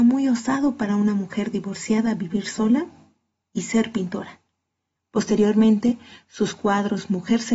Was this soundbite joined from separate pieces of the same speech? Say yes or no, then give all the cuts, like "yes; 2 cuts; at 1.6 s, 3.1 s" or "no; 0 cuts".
yes; 1 cut; at 5.0 s